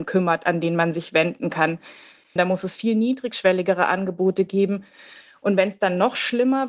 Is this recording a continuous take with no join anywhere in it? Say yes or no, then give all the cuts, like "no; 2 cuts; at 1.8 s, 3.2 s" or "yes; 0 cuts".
no; 1 cut; at 2.4 s